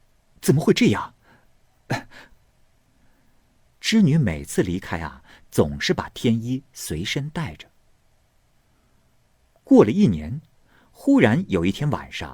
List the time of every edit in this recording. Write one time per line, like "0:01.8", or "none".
0:02.5

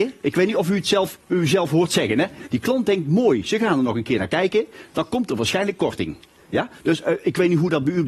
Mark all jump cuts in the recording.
0:02.5

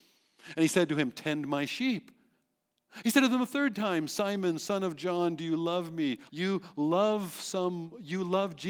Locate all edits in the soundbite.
0:06.3

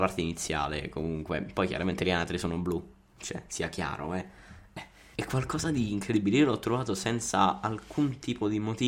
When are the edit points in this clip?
0:05.1

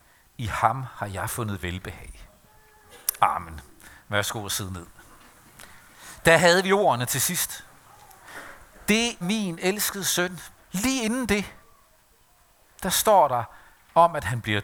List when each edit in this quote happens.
0:09.2
0:10.6

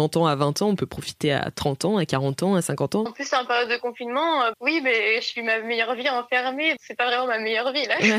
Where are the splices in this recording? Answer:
0:03.1
0:04.5
0:06.8

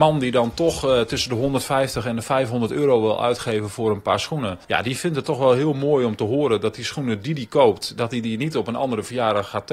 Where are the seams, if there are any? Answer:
0:04.6

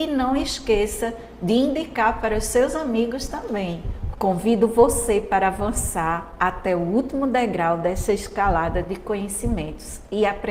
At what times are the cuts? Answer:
0:04.1

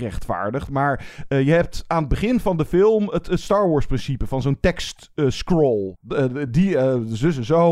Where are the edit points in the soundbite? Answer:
none

